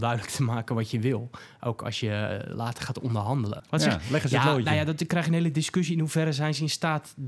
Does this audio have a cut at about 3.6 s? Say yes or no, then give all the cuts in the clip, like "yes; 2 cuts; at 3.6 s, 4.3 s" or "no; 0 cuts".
yes; 1 cut; at 3.6 s